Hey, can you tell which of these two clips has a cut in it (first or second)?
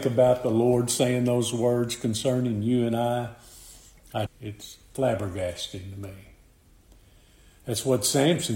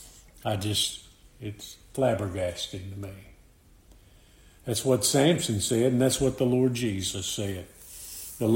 first